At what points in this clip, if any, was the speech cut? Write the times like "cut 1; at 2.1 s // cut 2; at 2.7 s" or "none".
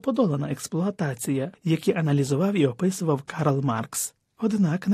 cut 1; at 1.5 s